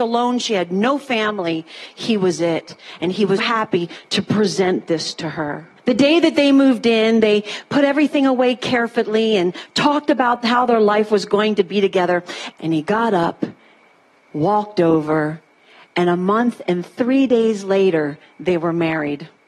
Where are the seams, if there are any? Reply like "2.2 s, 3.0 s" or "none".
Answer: 3.4 s, 5.8 s, 12.5 s